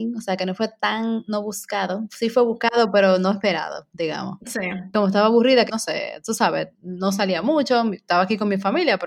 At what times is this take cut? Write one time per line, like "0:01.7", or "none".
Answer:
0:05.7
0:06.7